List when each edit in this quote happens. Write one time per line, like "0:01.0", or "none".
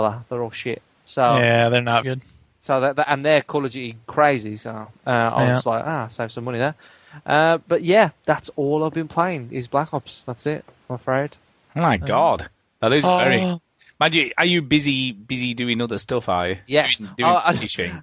0:02.0

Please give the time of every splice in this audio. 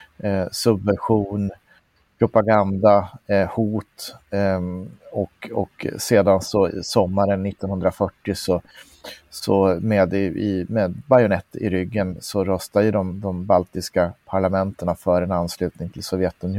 none

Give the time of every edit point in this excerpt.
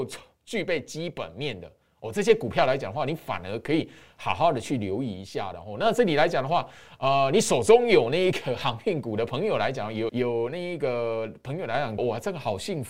0:10.1
0:12.0

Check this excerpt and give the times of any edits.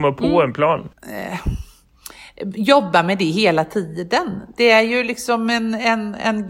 0:00.9

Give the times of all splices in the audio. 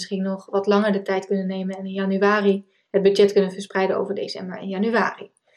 none

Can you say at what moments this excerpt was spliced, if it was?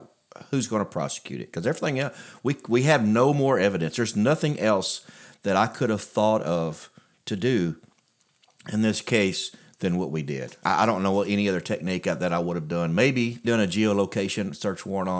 0:10.6
0:13.4

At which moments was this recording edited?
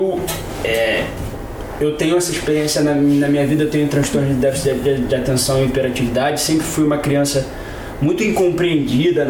none

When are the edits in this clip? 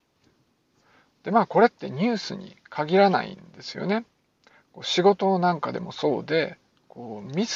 none

